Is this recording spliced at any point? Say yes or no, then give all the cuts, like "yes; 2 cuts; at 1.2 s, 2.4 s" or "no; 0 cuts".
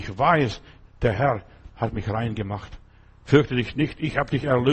no; 0 cuts